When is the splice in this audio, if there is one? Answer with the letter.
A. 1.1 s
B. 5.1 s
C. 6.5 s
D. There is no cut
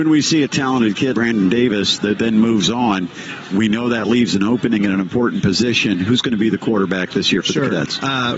A